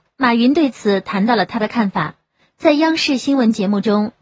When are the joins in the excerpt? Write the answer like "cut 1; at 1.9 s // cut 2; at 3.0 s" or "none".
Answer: none